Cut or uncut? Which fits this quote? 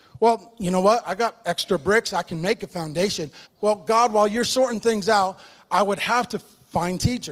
cut